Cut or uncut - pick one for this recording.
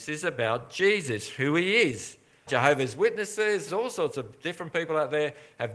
cut